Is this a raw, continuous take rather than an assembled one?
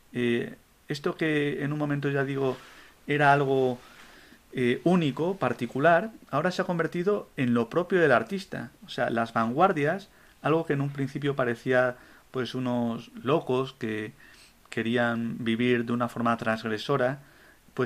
no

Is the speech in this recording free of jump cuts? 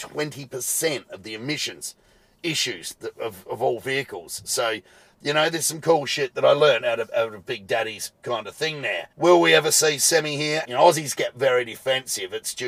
no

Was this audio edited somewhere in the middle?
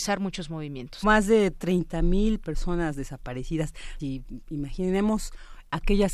yes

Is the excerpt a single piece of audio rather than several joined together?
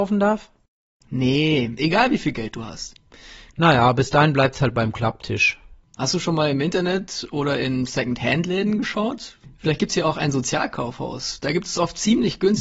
no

